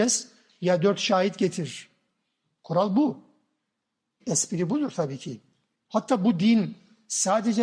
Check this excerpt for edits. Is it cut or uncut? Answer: cut